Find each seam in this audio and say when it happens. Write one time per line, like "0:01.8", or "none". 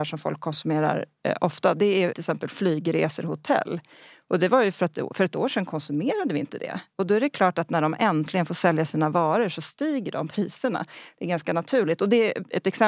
none

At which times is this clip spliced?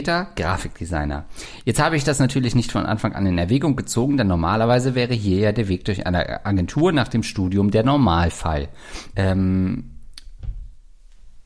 0:09.1

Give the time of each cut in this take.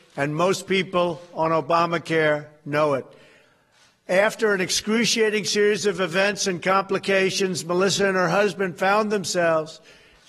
none

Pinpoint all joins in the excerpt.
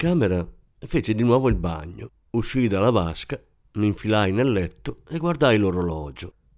0:02.2

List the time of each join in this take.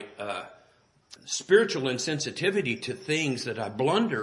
0:01.2

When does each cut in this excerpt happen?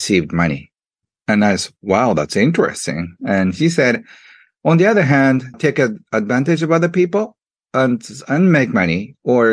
0:05.5

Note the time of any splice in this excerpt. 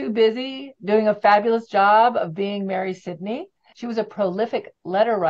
0:03.7

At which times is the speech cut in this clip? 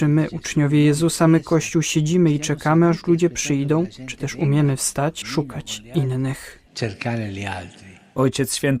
0:05.2

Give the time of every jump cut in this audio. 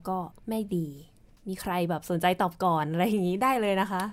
none

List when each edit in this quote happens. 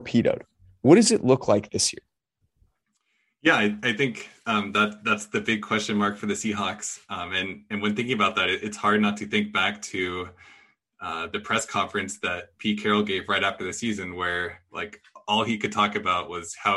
none

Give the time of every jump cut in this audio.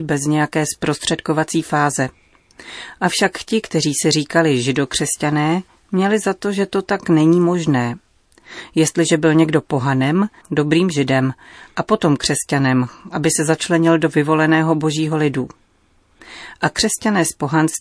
0:10.4

